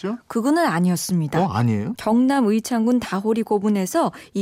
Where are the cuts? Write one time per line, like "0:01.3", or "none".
0:01.9

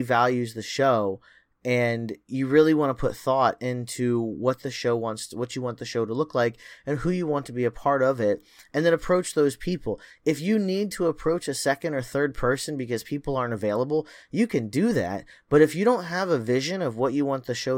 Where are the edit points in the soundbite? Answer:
none

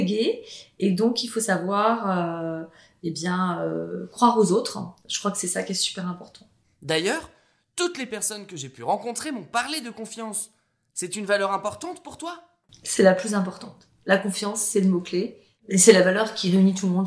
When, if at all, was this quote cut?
none

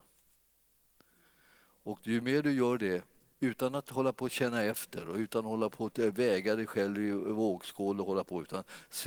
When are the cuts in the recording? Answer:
none

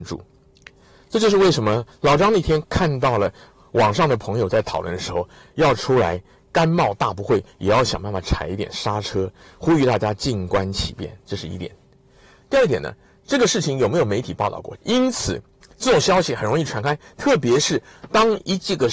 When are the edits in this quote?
0:14.8

